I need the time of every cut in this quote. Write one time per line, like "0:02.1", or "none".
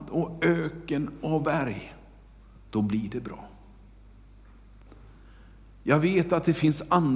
0:02.6